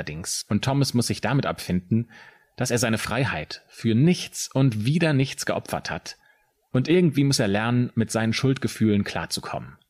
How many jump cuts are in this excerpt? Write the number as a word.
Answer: zero